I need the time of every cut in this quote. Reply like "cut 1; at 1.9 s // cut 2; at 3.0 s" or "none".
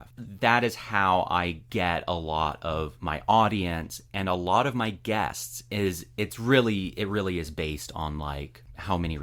none